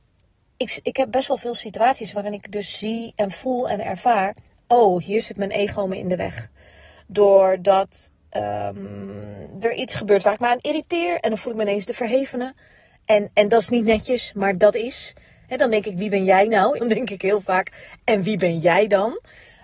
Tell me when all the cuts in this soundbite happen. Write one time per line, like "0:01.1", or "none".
0:16.8